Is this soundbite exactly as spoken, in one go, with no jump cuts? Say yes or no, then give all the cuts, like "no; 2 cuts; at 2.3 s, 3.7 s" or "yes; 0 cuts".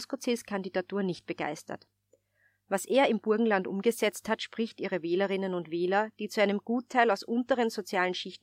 yes; 0 cuts